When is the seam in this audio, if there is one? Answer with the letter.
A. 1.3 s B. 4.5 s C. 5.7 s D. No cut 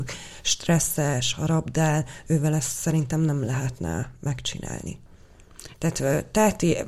C